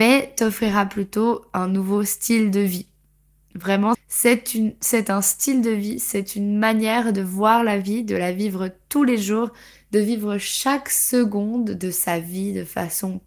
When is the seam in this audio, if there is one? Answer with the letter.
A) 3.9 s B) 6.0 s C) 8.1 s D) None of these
A